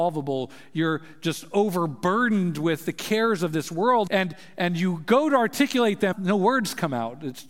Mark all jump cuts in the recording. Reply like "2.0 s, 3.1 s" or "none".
4.1 s, 6.1 s